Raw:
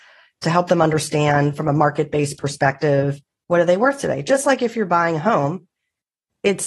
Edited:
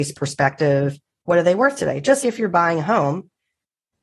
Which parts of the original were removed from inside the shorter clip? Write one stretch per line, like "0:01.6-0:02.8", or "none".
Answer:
0:04.4-0:04.6